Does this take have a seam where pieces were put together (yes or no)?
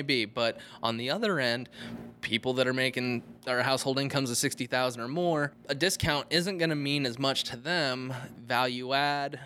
no